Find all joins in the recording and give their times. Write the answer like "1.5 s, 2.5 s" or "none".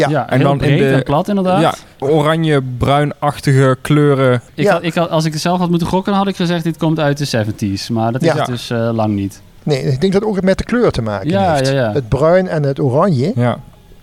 2.0 s